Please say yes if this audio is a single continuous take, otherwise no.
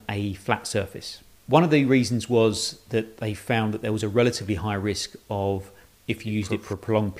no